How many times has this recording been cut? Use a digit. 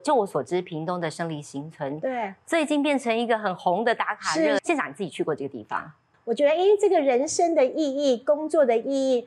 2